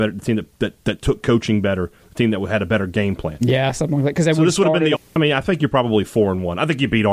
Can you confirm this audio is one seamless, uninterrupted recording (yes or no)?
no